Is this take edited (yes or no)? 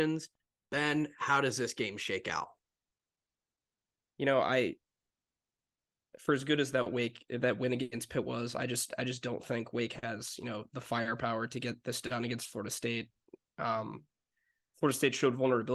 no